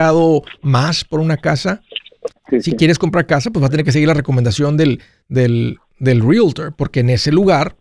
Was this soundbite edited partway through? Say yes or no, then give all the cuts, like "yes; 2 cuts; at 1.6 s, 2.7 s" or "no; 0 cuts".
yes; 1 cut; at 2.3 s